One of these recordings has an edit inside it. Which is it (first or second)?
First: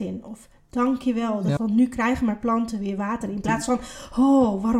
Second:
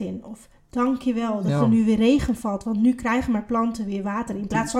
first